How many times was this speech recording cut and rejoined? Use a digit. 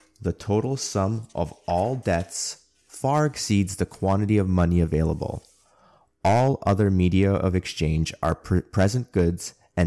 0